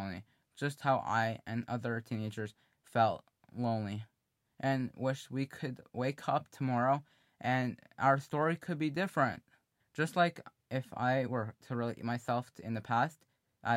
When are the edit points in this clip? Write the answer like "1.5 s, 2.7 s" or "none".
9.8 s